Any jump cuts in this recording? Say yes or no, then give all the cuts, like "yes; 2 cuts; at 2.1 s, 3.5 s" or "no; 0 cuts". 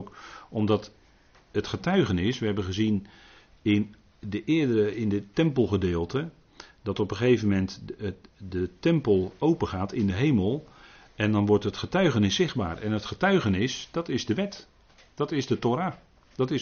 no; 0 cuts